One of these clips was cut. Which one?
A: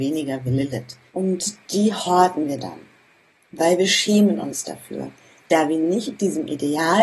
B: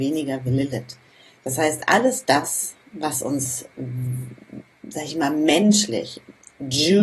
A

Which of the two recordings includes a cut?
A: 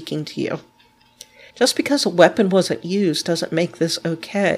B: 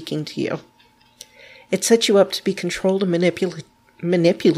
A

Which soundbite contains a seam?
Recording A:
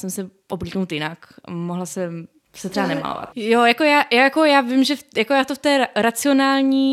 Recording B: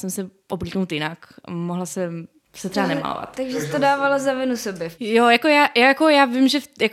A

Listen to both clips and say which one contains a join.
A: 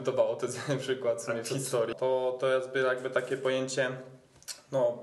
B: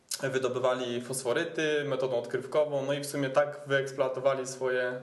A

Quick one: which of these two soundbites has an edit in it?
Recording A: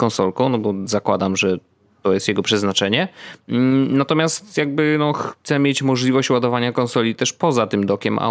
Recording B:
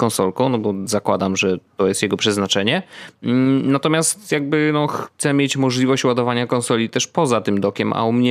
B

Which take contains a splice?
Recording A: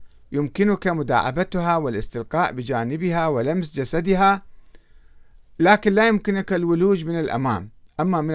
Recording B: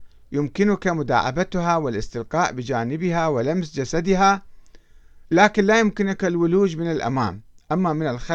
B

